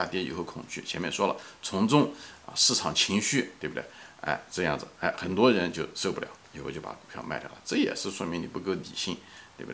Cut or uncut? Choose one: uncut